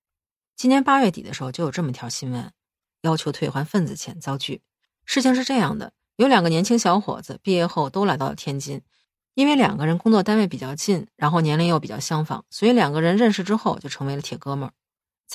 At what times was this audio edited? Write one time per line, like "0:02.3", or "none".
0:02.9